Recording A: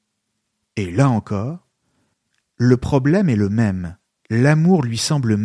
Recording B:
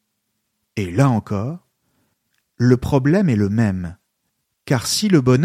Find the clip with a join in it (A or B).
A